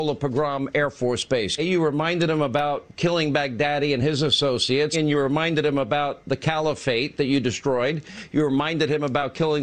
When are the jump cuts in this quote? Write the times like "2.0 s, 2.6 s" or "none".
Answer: 1.6 s, 4.9 s